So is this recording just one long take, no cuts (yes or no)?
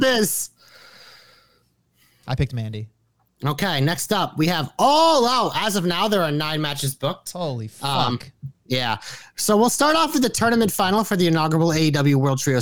yes